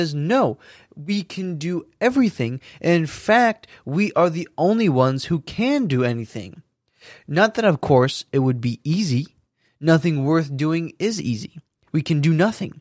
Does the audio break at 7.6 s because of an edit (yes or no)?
no